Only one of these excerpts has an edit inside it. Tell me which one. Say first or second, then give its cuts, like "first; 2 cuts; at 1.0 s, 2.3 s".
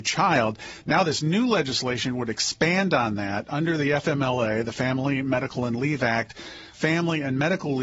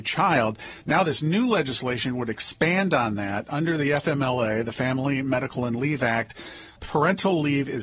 first; 1 cut; at 6.7 s